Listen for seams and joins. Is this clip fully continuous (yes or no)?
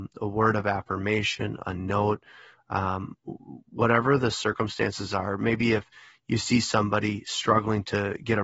yes